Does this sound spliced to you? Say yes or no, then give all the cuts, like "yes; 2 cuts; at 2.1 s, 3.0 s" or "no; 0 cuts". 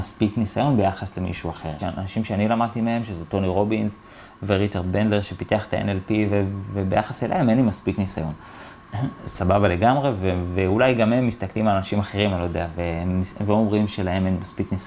yes; 1 cut; at 1.8 s